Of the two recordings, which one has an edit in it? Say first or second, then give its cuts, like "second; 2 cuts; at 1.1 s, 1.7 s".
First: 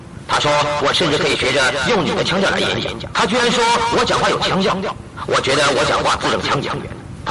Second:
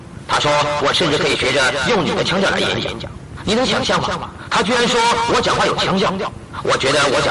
first; 1 cut; at 3.1 s